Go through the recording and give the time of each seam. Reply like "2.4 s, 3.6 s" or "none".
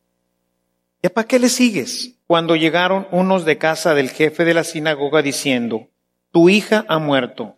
2.2 s

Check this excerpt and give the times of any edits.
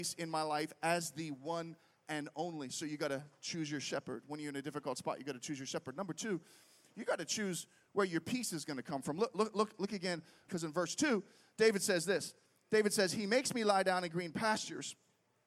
10.5 s

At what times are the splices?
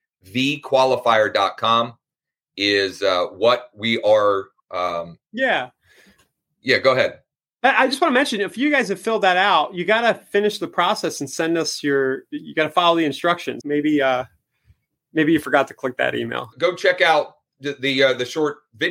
13.6 s, 16.5 s

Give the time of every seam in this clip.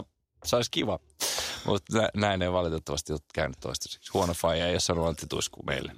none

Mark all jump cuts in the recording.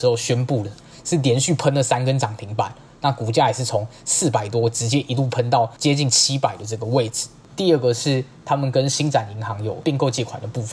7.5 s

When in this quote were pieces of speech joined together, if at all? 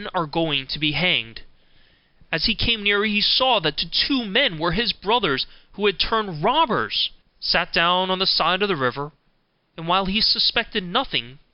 7.2 s

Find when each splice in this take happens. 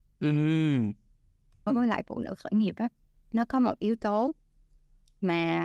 1.7 s

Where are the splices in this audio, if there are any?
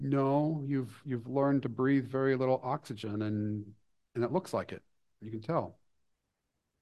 none

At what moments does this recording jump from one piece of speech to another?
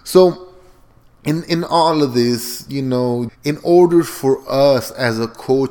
3.3 s

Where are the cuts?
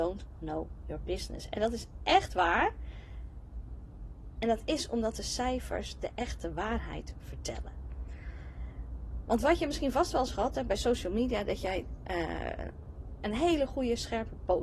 none

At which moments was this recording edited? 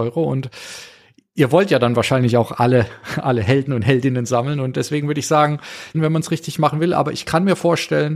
5.9 s

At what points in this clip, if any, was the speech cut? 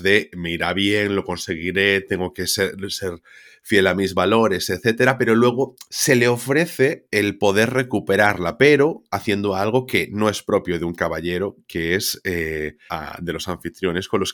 5.9 s, 12.9 s

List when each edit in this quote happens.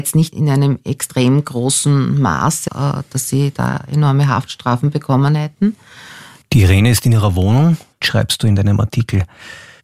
2.7 s, 6.4 s, 8.0 s

